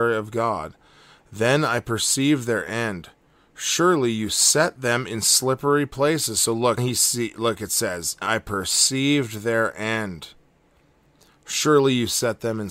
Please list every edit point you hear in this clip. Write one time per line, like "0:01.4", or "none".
0:06.8
0:08.2

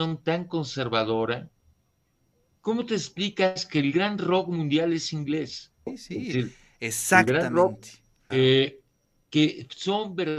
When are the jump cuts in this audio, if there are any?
0:05.9
0:08.3

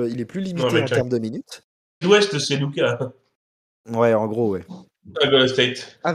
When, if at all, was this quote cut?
0:02.0
0:03.8
0:05.1

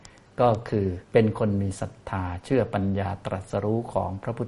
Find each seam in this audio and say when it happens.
0:01.0

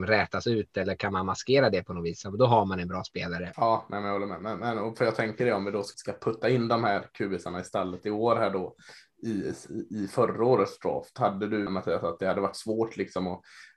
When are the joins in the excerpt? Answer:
0:03.5
0:05.9
0:11.7

